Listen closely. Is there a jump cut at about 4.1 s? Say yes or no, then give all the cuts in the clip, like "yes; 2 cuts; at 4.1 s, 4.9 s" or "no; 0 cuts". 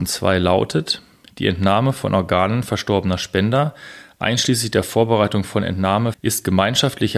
no; 1 cut; at 6.1 s